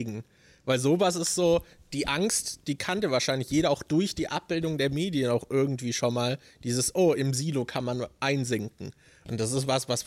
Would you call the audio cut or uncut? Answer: uncut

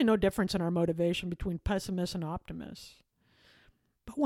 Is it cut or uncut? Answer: uncut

